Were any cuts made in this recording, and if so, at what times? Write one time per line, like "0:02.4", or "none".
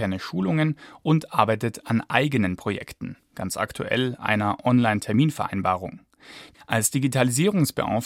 0:06.5